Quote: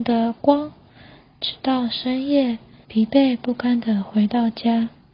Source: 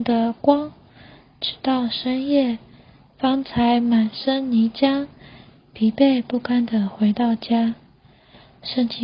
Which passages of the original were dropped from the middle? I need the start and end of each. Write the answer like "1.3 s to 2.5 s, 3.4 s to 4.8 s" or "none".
2.8 s to 5.7 s